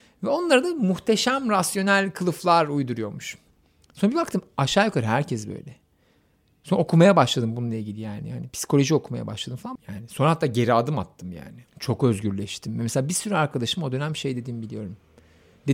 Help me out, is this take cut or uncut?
cut